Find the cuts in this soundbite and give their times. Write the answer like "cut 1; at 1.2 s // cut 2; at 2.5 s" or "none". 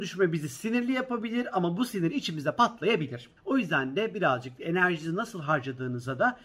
cut 1; at 3.4 s